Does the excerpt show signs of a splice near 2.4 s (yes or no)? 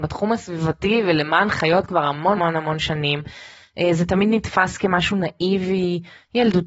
yes